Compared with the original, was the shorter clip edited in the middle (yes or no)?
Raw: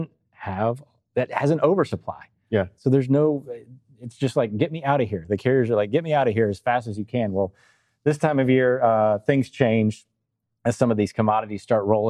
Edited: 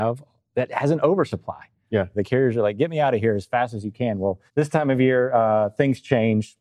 yes